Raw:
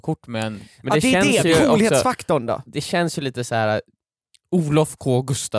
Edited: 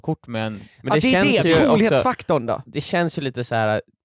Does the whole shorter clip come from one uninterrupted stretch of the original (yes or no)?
yes